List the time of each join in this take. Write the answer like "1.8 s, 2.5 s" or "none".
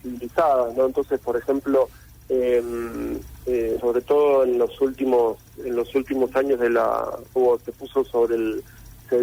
3.8 s, 7.4 s